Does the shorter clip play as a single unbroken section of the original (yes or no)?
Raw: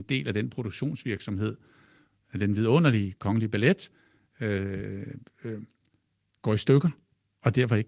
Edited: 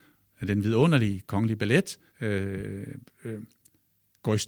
no